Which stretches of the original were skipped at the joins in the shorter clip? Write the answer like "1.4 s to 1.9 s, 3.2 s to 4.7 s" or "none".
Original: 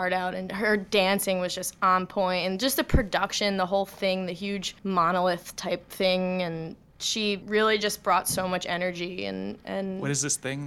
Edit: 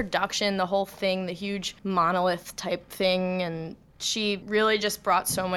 none